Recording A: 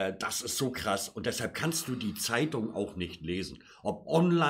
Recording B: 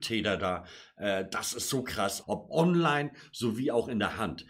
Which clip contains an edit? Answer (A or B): B